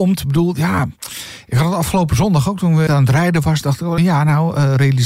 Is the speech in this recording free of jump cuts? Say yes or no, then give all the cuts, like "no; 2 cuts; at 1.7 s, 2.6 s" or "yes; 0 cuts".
no; 2 cuts; at 2.9 s, 4.0 s